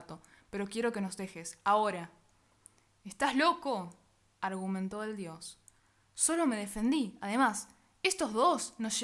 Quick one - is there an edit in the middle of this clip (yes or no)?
no